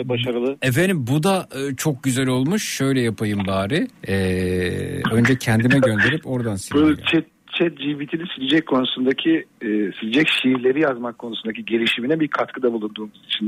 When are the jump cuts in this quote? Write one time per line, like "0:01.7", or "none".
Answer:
0:04.0